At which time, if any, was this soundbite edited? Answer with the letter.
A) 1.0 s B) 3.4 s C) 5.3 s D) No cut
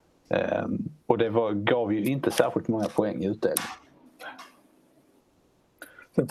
A